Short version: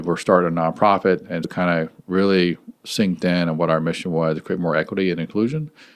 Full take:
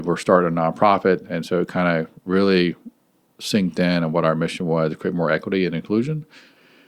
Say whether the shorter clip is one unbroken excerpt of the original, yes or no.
no